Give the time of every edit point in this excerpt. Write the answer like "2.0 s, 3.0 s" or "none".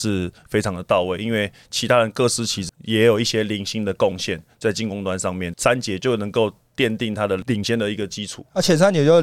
2.7 s, 5.5 s